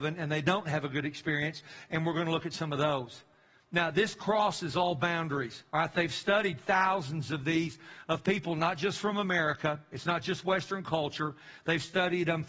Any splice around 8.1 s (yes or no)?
no